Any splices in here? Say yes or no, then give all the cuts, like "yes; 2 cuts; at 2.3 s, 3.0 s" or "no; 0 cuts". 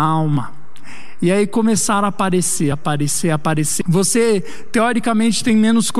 yes; 2 cuts; at 2.7 s, 3.8 s